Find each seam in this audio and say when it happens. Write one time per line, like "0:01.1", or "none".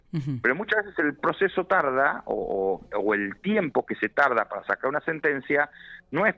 none